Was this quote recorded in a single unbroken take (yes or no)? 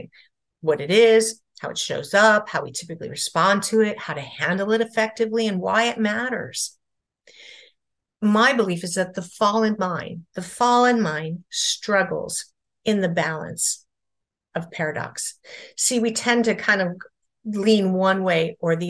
yes